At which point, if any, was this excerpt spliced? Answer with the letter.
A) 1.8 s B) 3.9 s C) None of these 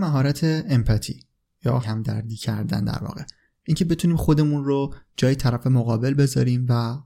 A